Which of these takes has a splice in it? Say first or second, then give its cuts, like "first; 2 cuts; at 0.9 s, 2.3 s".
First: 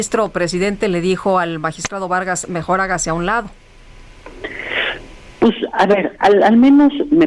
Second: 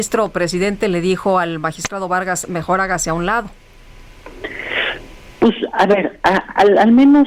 first; 1 cut; at 6.2 s